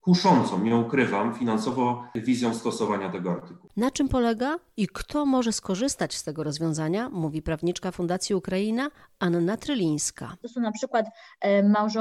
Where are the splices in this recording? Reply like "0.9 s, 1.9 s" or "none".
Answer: 3.7 s, 10.4 s